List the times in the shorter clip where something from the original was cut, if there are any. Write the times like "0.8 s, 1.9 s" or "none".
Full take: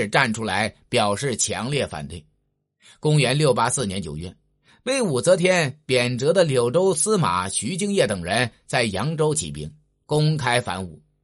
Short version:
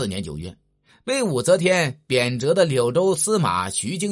none